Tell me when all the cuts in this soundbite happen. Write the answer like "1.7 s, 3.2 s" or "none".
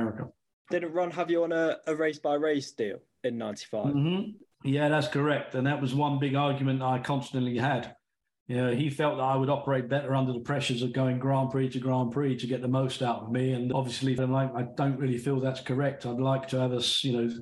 14.2 s

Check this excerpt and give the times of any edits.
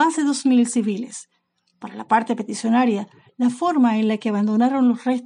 none

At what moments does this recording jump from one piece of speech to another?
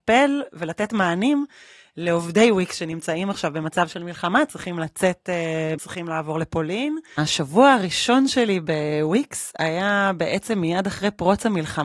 5.8 s, 7.2 s

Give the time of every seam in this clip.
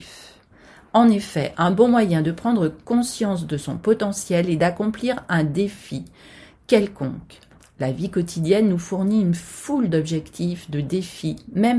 none

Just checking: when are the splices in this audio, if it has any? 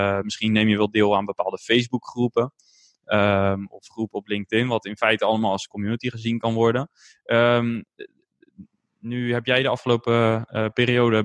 none

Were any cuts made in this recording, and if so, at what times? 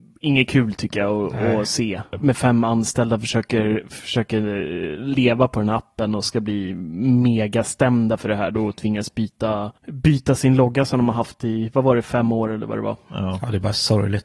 2.1 s, 9.8 s

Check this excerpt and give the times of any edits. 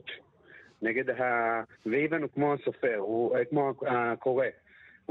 1.7 s

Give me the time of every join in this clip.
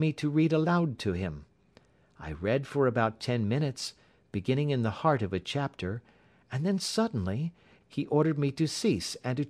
7.8 s

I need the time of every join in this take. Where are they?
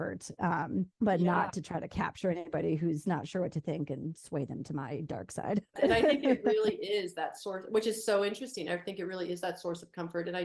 0.9 s, 5.8 s

